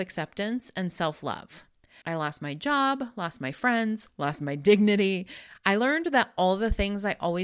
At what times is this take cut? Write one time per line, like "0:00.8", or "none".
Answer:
0:02.0
0:04.1
0:05.5